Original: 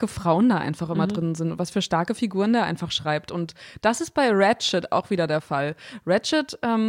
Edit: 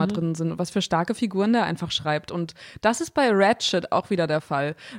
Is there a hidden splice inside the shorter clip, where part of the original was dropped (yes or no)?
no